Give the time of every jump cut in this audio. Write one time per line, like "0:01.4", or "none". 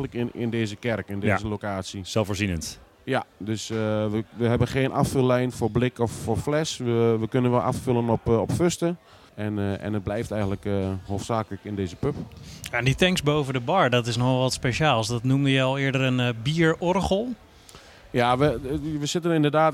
0:09.3